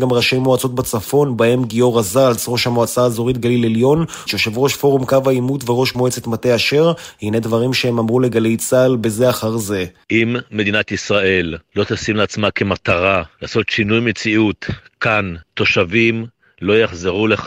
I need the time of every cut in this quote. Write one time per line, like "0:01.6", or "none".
0:04.3
0:15.4